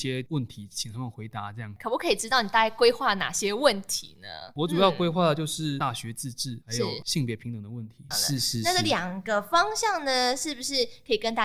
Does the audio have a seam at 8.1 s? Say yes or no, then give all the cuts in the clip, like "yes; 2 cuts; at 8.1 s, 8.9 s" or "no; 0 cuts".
yes; 1 cut; at 8.1 s